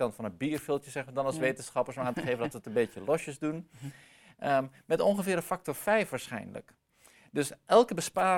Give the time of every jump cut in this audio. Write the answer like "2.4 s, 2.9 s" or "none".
none